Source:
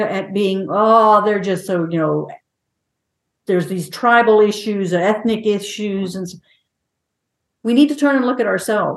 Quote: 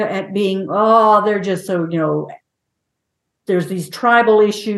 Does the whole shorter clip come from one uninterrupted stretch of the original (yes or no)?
yes